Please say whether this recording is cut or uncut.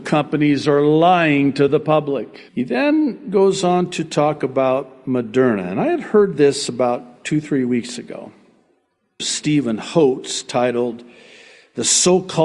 cut